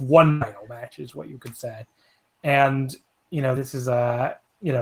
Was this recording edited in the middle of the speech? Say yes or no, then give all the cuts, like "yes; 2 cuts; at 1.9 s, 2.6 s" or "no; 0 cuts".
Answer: no; 0 cuts